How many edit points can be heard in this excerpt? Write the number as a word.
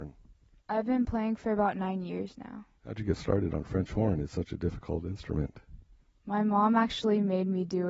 one